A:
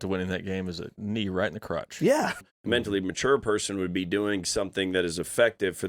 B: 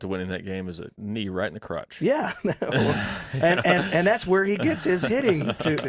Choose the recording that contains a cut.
A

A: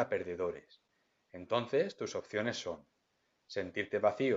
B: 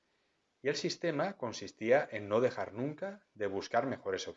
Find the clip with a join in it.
A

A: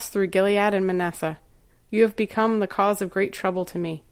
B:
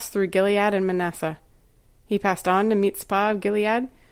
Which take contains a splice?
A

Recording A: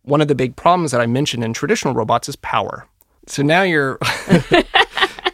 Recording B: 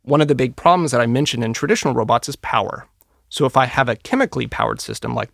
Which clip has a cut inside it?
A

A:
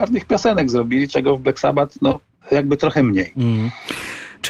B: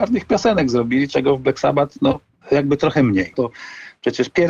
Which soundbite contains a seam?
B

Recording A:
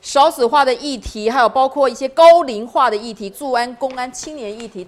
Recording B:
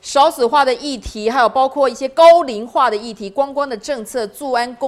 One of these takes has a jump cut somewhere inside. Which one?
A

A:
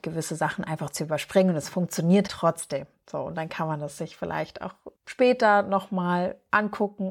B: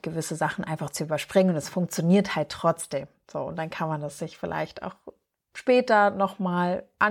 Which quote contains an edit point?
A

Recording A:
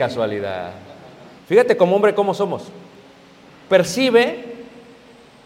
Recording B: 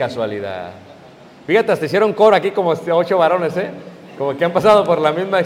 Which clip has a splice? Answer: A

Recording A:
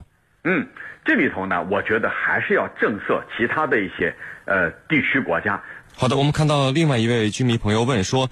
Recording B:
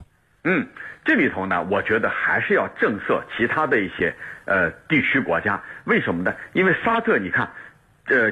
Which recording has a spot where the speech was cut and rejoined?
A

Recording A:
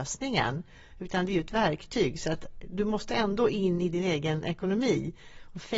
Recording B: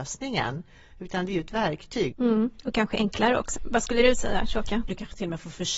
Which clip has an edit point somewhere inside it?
B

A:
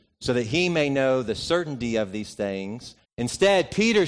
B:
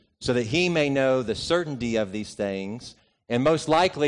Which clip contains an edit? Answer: A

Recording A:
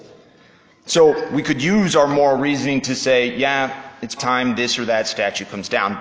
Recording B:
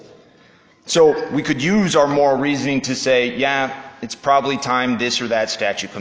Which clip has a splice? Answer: A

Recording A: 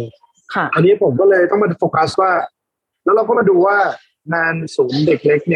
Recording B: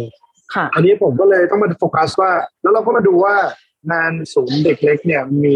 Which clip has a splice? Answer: B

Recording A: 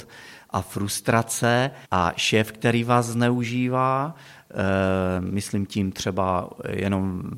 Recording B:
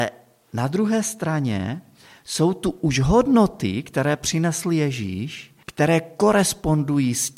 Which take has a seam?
A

